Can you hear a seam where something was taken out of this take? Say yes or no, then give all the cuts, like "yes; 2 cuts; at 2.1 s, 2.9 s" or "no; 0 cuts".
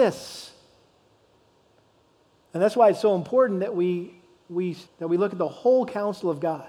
yes; 2 cuts; at 2.4 s, 4.9 s